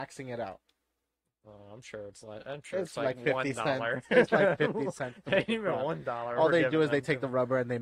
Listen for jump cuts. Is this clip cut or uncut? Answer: uncut